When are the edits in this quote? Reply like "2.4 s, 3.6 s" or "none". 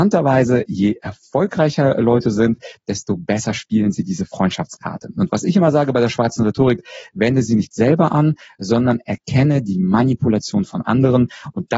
none